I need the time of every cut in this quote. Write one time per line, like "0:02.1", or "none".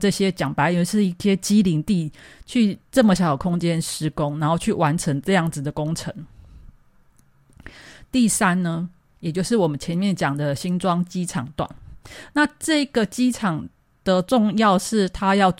0:03.2